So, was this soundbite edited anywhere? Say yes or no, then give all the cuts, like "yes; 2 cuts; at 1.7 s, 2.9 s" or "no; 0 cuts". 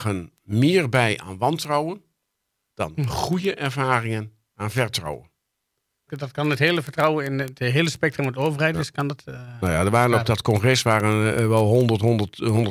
yes; 1 cut; at 6.1 s